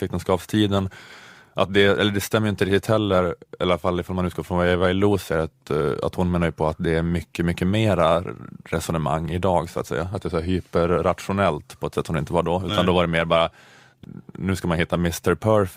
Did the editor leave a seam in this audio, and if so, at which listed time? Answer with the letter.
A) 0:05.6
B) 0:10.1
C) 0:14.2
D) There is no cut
D